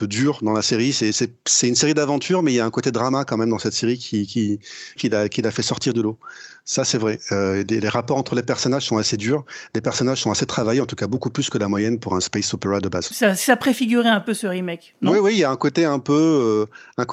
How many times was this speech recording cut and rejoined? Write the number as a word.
two